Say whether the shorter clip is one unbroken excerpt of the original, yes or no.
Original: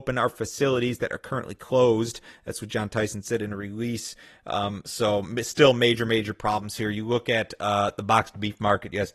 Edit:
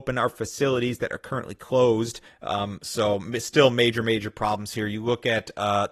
no